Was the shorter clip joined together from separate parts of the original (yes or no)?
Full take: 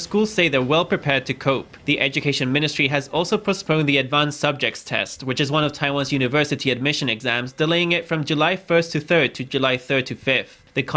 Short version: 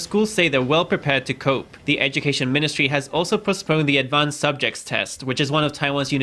no